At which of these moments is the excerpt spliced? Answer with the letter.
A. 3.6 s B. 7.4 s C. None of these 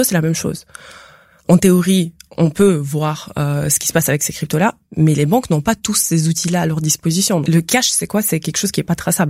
B